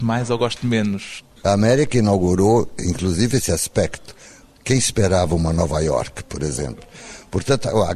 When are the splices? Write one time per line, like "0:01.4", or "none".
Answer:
0:01.4